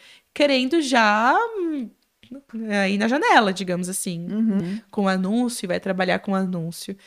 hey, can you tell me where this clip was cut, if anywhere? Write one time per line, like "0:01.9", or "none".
0:04.6